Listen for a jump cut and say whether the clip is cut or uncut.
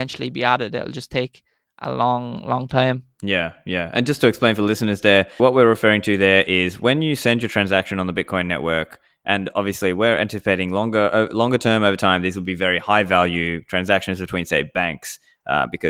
cut